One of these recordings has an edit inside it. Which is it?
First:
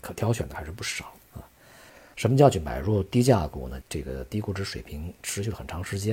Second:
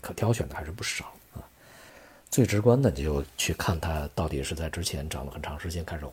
first; 2 cuts; at 2.1 s, 3.8 s

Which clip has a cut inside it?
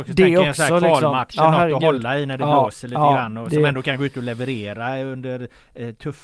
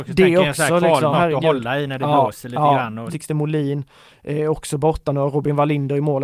second; 2 cuts; at 1.1 s, 3.1 s

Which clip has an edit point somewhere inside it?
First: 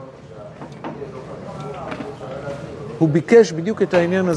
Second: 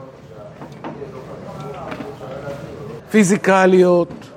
second; 1 cut; at 3.0 s

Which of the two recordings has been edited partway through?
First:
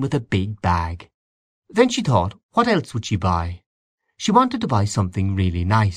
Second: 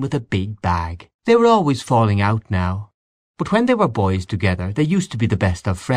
second; 1 cut; at 1.2 s

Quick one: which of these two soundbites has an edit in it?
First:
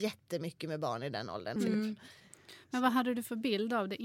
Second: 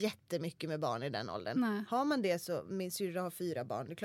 first; 1 cut; at 1.6 s

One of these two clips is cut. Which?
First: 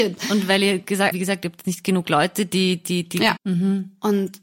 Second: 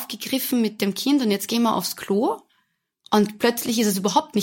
first; 2 cuts; at 1.1 s, 3.4 s

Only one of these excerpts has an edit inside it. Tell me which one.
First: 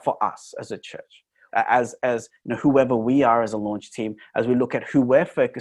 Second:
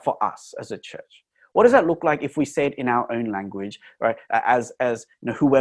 first; 1 cut; at 1.5 s

